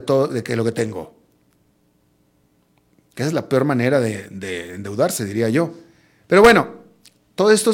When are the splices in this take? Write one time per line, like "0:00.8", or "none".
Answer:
none